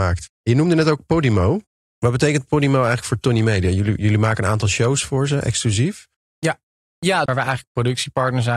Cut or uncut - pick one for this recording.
cut